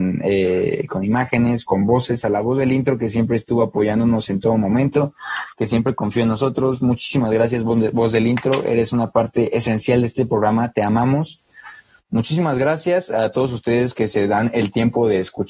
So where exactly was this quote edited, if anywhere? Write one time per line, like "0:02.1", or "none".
0:01.7